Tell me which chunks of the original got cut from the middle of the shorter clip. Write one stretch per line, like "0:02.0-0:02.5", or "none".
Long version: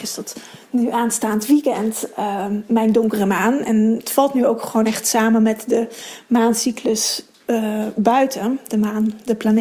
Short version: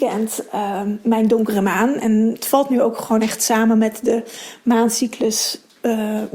none